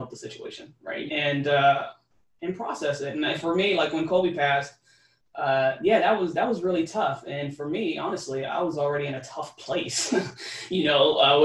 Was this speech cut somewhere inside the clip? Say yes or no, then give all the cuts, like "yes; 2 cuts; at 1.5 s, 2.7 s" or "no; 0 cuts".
yes; 1 cut; at 1.1 s